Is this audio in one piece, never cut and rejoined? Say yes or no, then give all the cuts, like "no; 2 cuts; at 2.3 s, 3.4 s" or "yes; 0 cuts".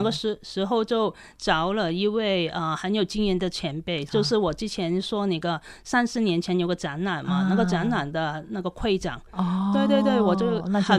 yes; 0 cuts